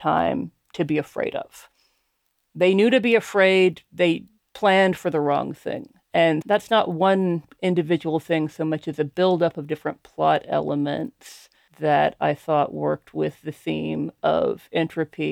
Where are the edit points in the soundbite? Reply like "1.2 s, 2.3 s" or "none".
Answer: 6.4 s

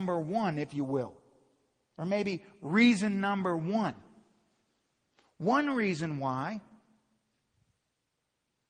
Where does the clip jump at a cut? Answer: none

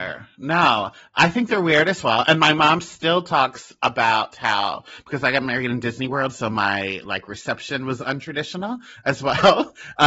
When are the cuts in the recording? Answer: none

